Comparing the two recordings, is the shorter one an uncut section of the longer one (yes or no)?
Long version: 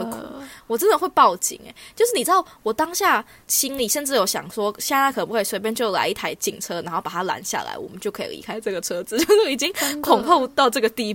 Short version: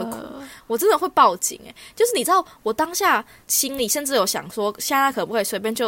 yes